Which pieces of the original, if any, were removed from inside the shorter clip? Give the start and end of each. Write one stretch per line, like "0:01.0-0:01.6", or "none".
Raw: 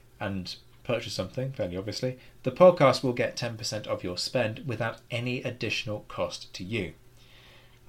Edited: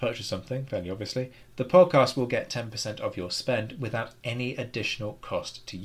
none

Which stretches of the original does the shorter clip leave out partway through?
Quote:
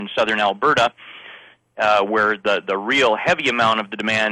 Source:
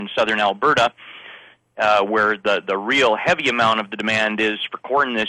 none

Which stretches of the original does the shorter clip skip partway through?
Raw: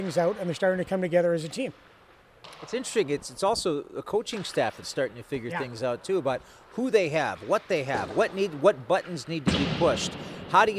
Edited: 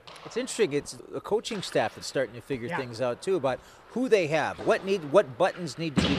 0:03.4-0:03.8
0:07.4-0:08.1

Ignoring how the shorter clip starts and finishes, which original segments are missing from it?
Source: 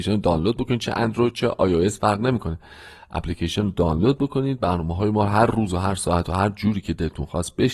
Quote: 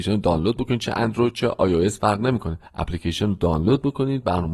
0:02.7-0:03.0

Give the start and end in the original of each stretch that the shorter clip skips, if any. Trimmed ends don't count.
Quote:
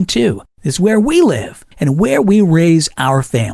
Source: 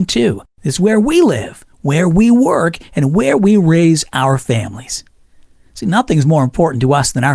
0:01.7-0:02.9

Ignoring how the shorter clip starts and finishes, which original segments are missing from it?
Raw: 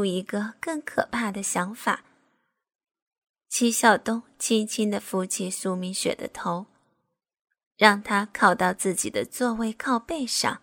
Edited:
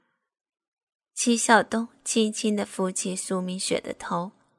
none

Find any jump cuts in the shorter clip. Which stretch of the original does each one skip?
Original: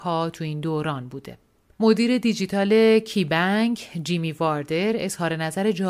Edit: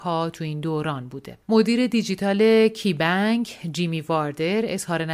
0:01.4-0:01.7

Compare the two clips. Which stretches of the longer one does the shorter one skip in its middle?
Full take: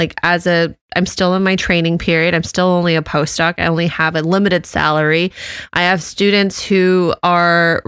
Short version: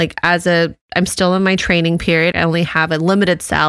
0:02.3-0:03.6

